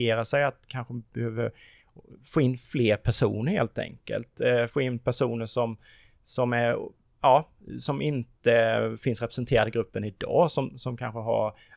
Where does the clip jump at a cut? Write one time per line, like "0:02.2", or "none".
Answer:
none